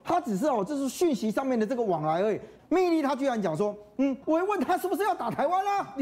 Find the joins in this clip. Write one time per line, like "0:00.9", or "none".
0:02.6
0:04.2